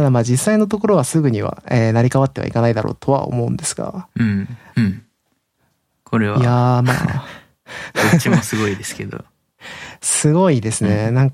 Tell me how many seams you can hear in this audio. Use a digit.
1